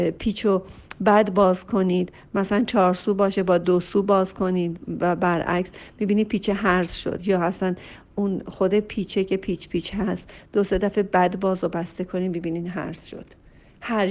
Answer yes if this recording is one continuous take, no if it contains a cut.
yes